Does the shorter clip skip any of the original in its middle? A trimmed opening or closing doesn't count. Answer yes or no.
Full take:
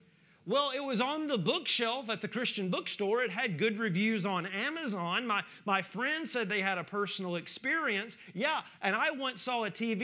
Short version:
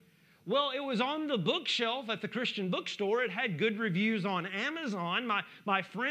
no